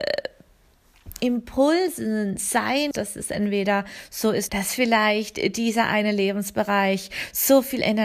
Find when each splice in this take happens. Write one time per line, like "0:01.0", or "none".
0:02.9
0:04.5